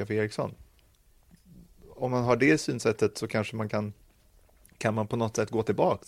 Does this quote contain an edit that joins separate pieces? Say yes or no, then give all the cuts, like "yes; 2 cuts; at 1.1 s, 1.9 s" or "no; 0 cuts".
no; 0 cuts